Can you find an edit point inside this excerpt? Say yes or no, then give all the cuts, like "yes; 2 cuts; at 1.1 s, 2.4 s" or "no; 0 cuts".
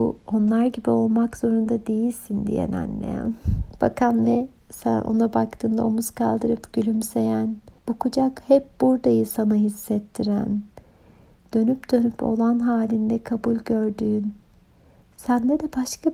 yes; 1 cut; at 7.8 s